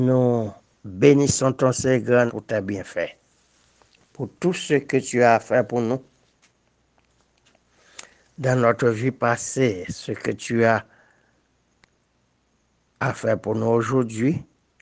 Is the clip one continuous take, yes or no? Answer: no